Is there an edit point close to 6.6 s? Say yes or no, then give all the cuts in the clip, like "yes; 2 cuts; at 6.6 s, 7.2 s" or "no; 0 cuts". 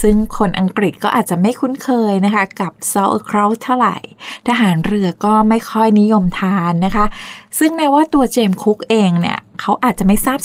no; 0 cuts